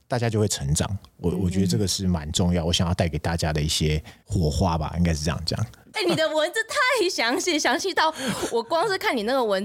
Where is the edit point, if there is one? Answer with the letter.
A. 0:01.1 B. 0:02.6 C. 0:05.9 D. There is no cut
C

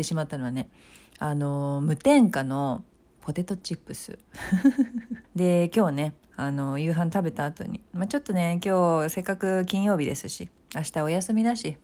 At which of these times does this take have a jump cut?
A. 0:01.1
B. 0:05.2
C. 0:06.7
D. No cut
B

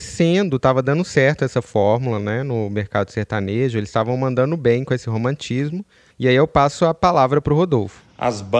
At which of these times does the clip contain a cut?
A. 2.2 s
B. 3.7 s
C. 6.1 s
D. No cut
C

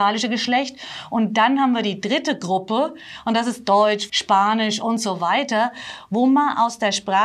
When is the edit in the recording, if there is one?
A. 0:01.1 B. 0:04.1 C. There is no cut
B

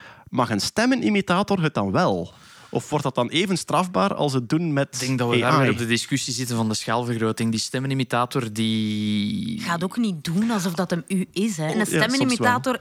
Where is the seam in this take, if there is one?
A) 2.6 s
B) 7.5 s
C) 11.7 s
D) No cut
C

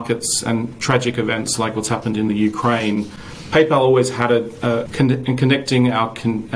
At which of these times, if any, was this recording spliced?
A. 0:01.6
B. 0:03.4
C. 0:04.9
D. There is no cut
C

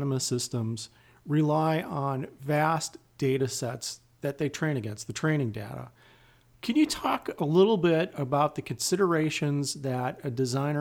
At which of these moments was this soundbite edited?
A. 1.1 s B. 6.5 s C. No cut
C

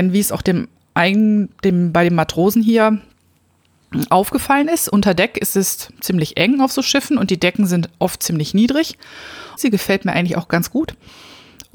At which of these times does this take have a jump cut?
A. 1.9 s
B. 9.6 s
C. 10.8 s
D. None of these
B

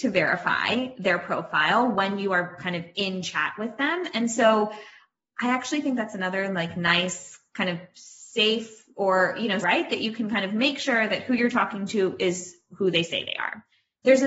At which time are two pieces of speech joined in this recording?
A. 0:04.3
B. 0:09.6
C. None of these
B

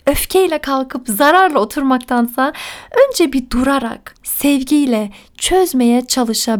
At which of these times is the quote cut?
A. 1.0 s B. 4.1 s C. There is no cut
B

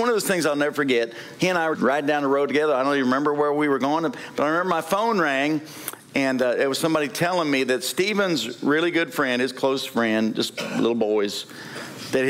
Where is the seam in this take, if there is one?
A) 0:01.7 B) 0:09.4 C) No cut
A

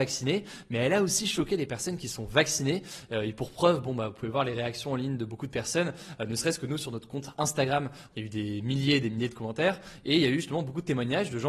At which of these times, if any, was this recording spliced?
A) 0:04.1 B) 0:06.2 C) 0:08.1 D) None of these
C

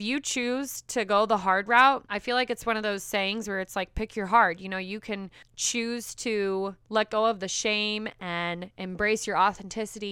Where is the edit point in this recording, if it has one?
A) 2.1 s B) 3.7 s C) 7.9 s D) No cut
D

